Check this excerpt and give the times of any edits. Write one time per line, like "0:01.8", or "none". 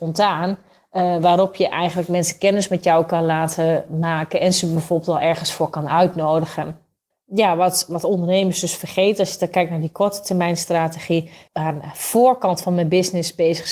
0:07.1
0:11.5